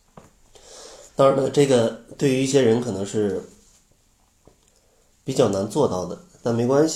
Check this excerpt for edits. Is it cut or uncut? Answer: cut